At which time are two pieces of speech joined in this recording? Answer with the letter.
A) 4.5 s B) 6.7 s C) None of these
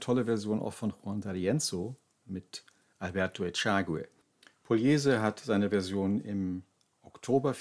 C